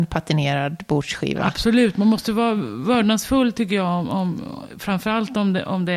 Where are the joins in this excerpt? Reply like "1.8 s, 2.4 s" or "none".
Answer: none